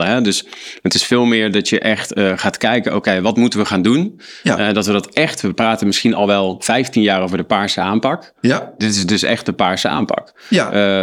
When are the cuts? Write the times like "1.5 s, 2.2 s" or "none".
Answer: none